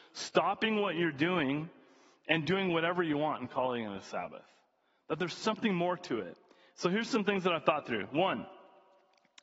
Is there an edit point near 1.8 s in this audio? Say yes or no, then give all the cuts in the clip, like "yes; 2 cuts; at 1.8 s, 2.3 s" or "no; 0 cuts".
no; 0 cuts